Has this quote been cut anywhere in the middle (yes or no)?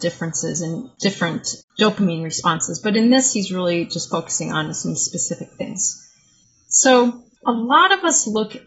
no